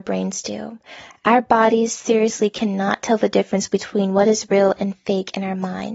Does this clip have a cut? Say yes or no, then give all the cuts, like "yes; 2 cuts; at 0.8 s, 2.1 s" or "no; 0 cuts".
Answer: no; 0 cuts